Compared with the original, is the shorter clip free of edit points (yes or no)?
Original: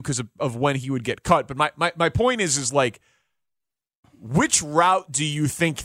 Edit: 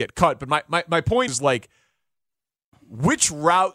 no